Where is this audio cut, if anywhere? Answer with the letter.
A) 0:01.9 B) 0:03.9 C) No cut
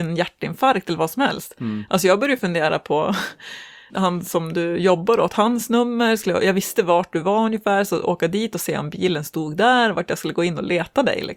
B